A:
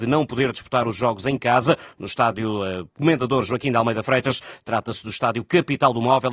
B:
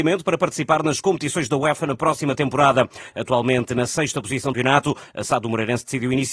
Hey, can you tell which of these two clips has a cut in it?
B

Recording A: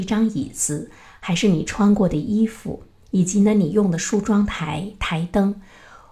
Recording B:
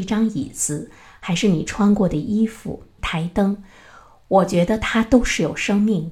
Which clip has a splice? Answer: B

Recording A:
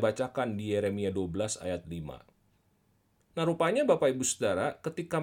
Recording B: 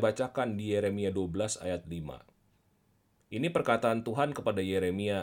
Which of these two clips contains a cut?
A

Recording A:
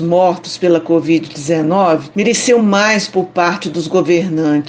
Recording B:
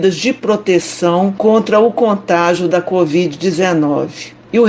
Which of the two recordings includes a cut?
A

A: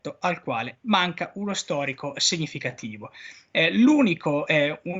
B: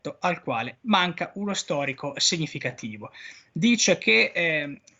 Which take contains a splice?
B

